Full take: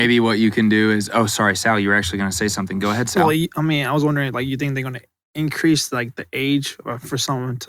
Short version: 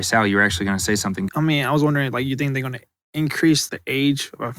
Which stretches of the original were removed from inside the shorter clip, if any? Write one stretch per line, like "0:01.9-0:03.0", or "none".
0:02.8-0:03.5
0:05.9-0:06.1